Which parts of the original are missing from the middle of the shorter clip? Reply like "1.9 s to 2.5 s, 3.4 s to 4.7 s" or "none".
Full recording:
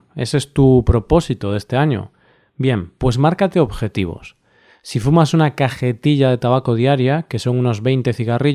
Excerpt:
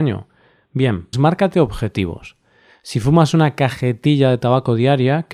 3.0 s to 3.1 s